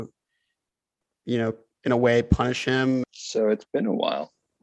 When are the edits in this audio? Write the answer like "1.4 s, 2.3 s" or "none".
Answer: 3.0 s